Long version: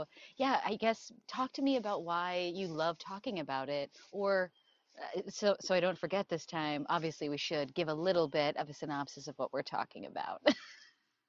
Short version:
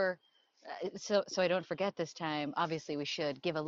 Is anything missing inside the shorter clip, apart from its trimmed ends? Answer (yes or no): no